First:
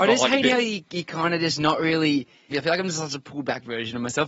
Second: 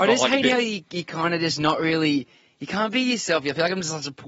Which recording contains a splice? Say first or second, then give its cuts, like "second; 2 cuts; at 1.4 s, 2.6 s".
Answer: first; 1 cut; at 2.5 s